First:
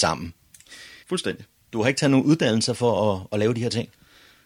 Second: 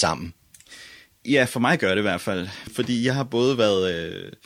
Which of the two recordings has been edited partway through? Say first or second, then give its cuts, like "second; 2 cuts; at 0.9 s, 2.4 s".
first; 1 cut; at 1.0 s